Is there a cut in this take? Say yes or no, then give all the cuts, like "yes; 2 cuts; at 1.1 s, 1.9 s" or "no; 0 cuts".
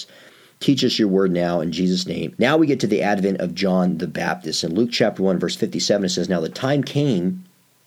yes; 2 cuts; at 2.4 s, 4.6 s